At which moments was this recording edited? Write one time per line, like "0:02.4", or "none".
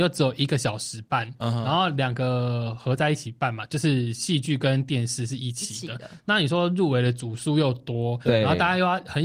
none